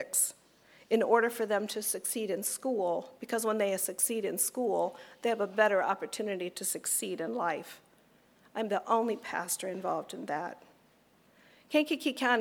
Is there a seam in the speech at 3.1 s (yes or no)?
no